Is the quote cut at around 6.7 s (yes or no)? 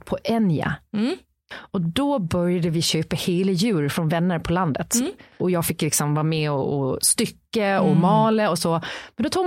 no